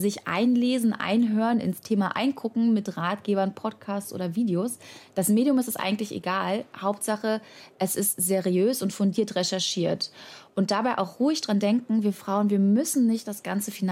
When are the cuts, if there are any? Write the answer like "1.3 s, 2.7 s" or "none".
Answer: none